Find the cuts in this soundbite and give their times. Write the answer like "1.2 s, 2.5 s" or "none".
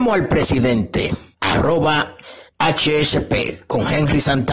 1.3 s, 2.5 s